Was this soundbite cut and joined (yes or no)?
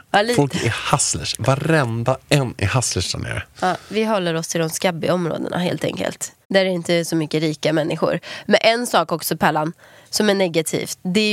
yes